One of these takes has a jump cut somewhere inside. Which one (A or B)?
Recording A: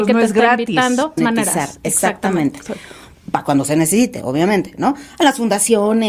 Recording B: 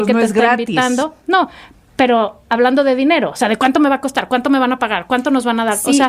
A